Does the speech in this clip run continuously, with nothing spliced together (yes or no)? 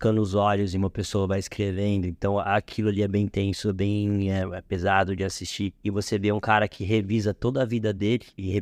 yes